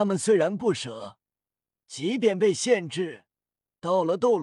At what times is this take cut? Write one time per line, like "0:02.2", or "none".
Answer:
0:01.7